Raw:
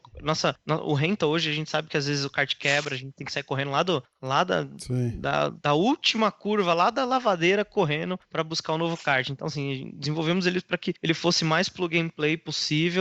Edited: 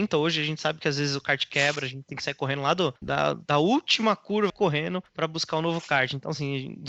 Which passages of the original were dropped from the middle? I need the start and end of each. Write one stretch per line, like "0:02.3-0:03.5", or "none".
0:04.1-0:05.2
0:06.7-0:07.7